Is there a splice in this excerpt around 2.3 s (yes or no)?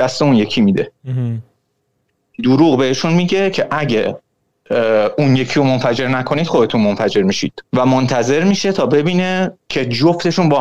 no